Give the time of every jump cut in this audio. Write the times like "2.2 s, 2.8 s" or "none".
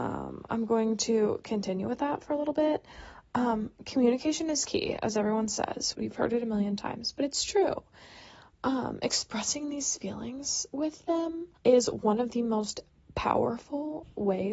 5.9 s, 11.6 s